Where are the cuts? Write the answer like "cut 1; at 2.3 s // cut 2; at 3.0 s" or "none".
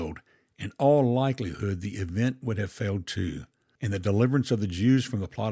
cut 1; at 3.8 s